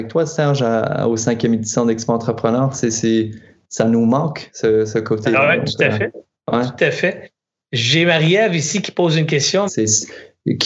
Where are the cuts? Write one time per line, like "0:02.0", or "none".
0:09.7